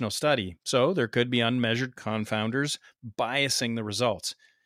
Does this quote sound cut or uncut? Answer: uncut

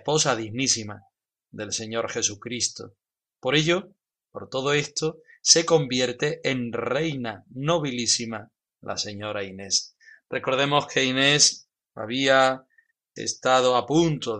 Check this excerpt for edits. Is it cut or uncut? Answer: uncut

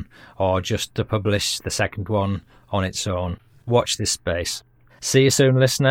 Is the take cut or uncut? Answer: cut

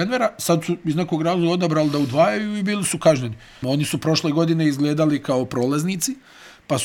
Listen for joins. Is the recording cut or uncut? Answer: cut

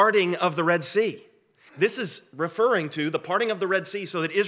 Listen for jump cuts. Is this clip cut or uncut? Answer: cut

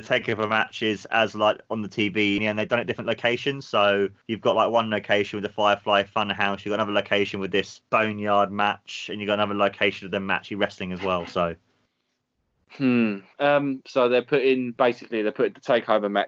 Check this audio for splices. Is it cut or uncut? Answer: cut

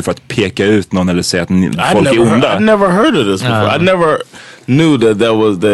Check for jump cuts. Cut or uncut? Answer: uncut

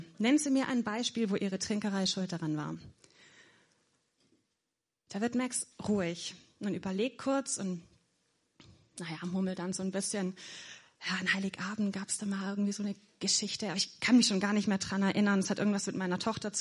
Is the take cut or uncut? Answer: uncut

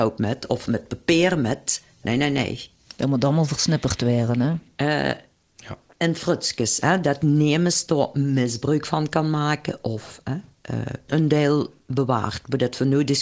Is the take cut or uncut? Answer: cut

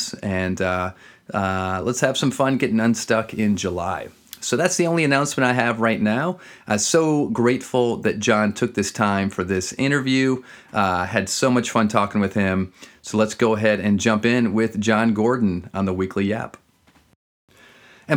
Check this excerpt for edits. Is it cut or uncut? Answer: uncut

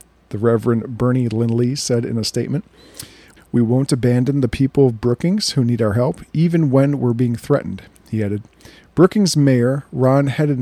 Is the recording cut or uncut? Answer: cut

